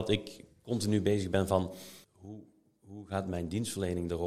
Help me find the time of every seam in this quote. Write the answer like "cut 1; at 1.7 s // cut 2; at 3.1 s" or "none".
cut 1; at 2.0 s

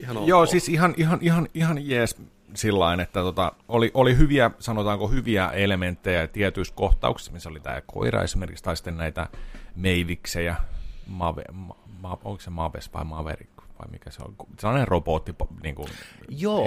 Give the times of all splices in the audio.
none

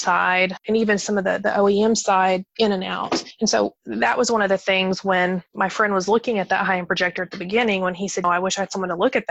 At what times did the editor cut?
cut 1; at 8.2 s

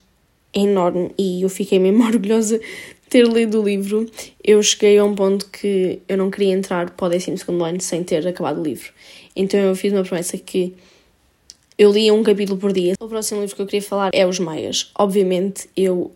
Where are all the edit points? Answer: cut 1; at 13.0 s // cut 2; at 14.1 s

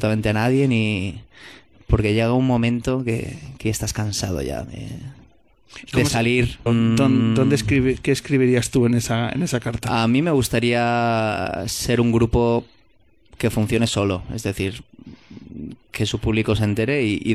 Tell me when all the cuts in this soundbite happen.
cut 1; at 6.7 s // cut 2; at 15.8 s

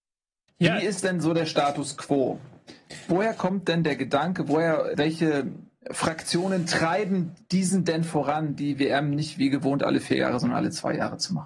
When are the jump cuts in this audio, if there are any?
cut 1; at 4.9 s

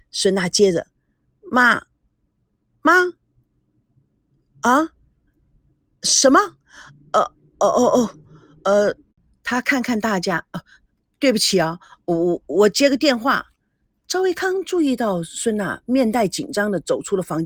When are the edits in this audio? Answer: none

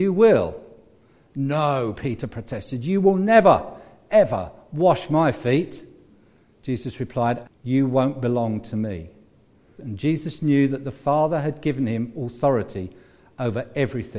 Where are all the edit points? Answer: cut 1; at 7.4 s // cut 2; at 9.8 s

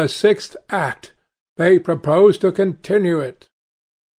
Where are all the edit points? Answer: cut 1; at 1.5 s

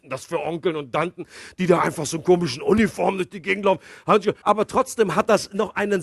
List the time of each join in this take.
cut 1; at 4.4 s

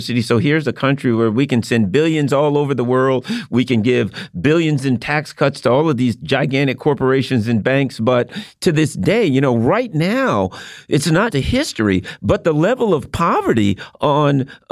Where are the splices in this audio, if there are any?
cut 1; at 11.3 s

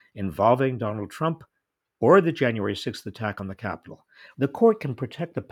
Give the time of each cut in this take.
cut 1; at 4.3 s

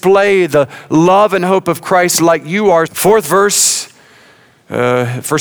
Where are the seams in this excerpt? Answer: cut 1; at 2.9 s

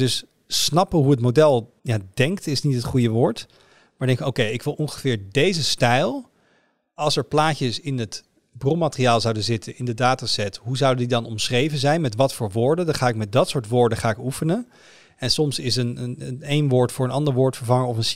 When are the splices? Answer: cut 1; at 1.8 s

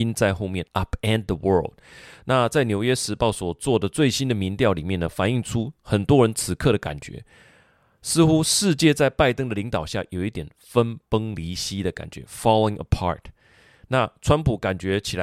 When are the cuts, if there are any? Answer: none

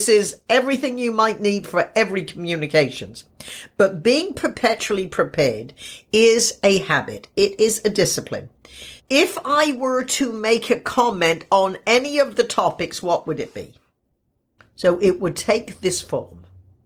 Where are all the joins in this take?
cut 1; at 9.0 s // cut 2; at 14.6 s

